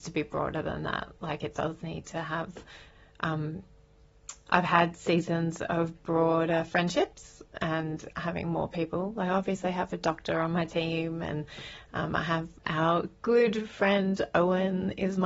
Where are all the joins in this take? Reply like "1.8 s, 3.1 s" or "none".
12.6 s